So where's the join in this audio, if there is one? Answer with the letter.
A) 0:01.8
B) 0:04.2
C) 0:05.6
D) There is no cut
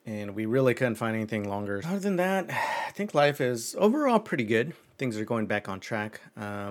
A